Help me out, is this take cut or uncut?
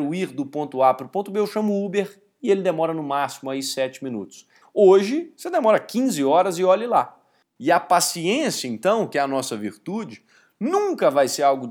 cut